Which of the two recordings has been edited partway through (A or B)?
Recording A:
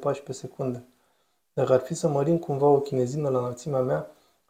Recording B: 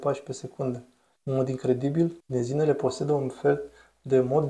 B